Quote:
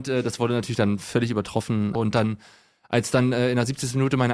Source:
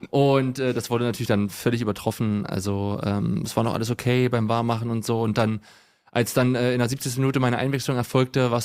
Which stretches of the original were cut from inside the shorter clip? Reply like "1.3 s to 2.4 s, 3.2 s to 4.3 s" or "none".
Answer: 2.5 s to 5.2 s